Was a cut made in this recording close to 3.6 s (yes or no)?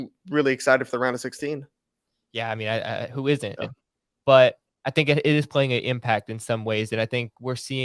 yes